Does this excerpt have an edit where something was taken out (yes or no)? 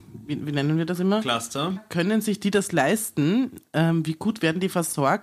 yes